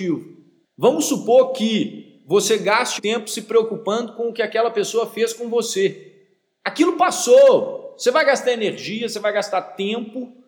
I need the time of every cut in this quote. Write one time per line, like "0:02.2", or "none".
0:03.0